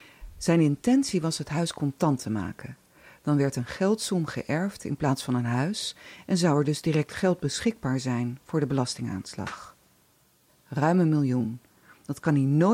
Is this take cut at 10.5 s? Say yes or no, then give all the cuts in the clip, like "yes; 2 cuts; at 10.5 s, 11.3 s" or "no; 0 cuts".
yes; 1 cut; at 10.5 s